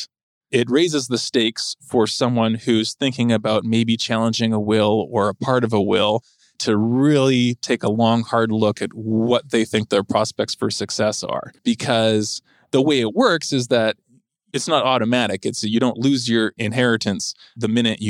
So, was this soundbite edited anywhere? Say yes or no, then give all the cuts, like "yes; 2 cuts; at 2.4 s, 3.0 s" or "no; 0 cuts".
no; 0 cuts